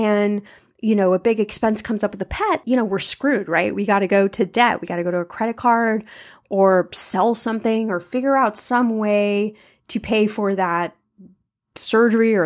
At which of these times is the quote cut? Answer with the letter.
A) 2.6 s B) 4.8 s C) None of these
A